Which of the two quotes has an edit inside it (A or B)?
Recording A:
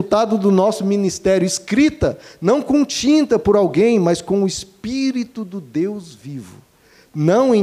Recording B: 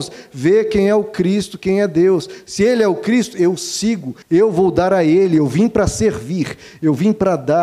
B